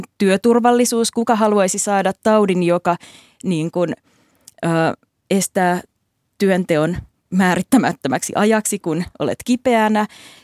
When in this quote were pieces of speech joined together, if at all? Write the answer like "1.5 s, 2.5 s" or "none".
none